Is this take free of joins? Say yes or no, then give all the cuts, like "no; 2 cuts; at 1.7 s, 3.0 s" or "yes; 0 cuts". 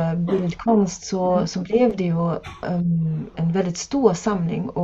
no; 1 cut; at 3.3 s